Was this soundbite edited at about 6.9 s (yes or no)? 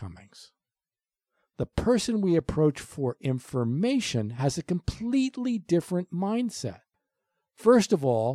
no